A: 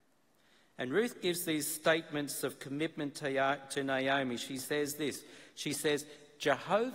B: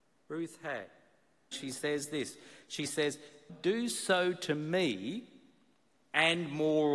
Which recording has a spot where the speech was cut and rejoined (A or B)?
B